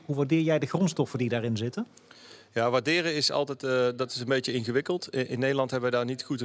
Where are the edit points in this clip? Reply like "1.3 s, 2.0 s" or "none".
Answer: none